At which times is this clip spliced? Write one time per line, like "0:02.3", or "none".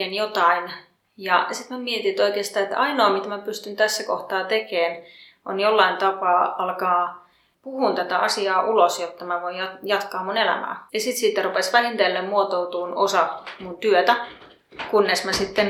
0:10.9